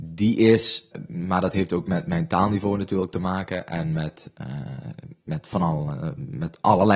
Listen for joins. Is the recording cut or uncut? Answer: cut